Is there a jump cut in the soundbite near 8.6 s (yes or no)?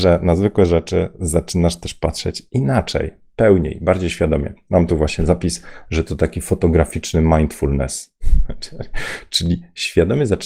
no